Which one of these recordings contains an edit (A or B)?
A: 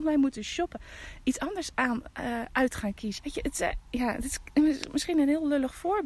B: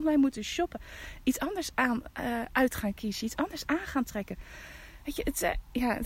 A